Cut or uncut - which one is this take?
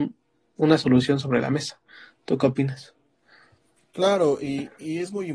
uncut